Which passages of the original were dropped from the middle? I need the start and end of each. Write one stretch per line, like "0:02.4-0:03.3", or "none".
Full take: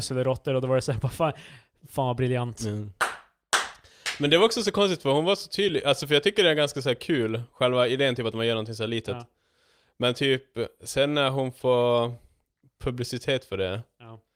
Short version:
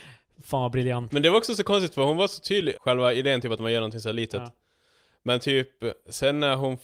0:02.5-0:04.2
0:05.8-0:07.5